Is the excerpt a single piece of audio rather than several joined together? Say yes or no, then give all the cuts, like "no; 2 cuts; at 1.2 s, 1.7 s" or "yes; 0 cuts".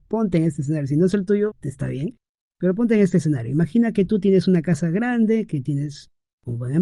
no; 1 cut; at 1.5 s